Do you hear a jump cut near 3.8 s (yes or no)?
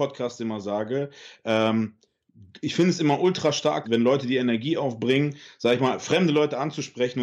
yes